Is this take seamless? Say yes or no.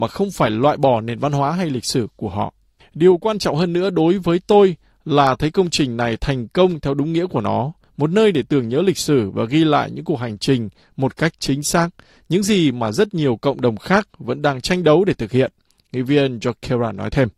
no